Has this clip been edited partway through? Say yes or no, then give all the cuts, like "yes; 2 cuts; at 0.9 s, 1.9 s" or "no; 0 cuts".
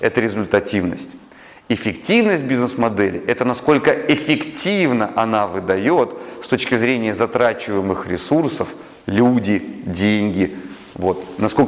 no; 0 cuts